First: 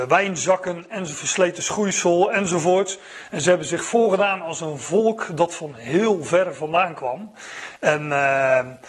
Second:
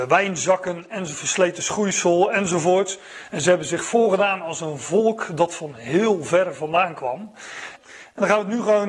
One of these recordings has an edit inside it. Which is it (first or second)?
second